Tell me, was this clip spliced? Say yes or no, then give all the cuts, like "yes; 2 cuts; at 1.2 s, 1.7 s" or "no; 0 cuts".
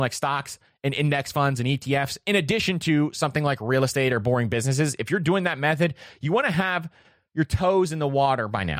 no; 0 cuts